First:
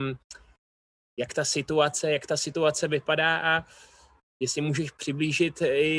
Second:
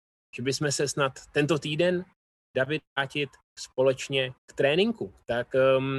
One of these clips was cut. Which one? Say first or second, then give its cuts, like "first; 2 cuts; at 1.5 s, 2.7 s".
second; 2 cuts; at 2.9 s, 4.4 s